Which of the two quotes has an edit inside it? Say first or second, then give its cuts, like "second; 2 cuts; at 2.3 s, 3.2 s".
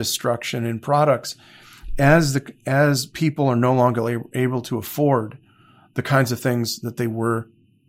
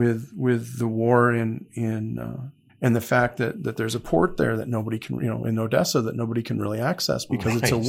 second; 1 cut; at 2.7 s